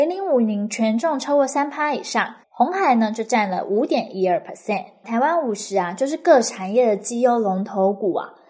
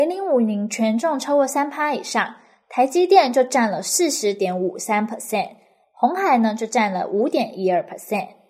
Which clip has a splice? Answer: first; 2 cuts; at 2.4 s, 5.0 s

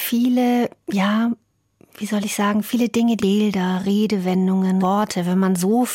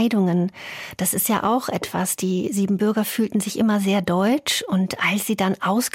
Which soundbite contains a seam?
first; 2 cuts; at 3.2 s, 4.8 s

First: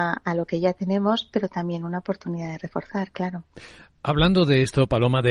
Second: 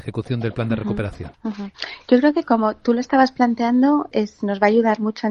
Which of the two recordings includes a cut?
second; 2 cuts; at 1.3 s, 4.1 s

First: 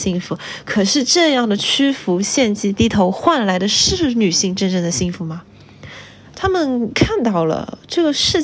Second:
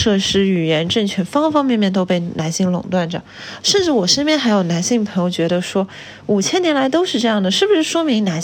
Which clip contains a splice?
first; 1 cut; at 6.3 s

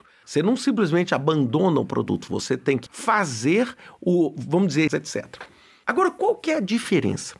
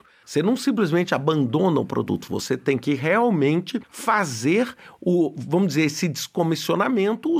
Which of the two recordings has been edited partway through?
first; 2 cuts; at 2.9 s, 4.9 s

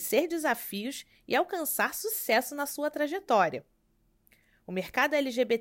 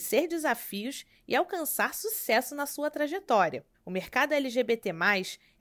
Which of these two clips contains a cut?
second; 1 cut; at 3.7 s

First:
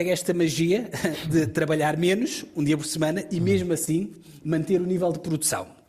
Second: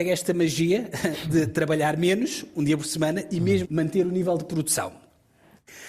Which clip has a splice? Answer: second; 1 cut; at 3.6 s

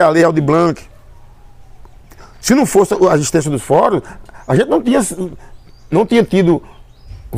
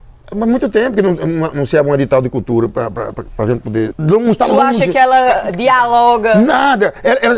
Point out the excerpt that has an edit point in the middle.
second; 1 cut; at 3.9 s

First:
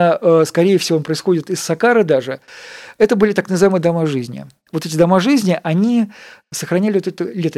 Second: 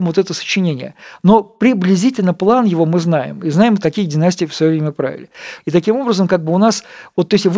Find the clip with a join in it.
second; 2 cuts; at 3.8 s, 5.6 s

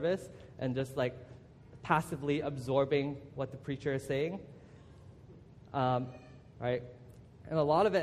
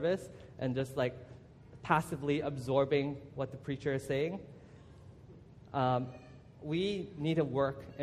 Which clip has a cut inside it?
first; 1 cut; at 6.5 s

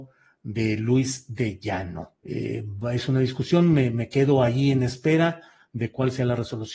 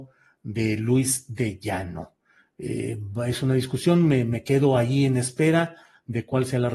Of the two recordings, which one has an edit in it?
first; 1 cut; at 2.2 s

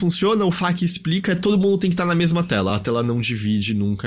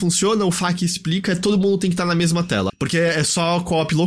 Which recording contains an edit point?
second; 1 cut; at 2.7 s

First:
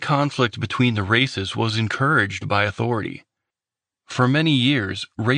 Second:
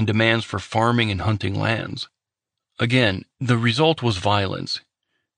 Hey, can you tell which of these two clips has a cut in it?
second; 1 cut; at 2.6 s

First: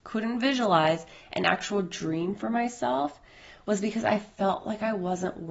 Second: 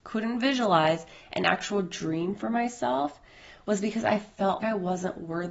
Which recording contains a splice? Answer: second; 1 cut; at 4.6 s

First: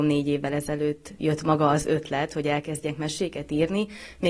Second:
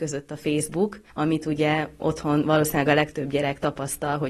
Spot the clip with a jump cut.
second; 1 cut; at 1.1 s

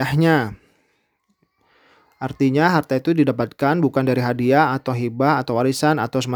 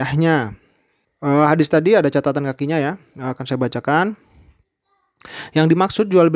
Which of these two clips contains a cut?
second; 1 cut; at 1.0 s

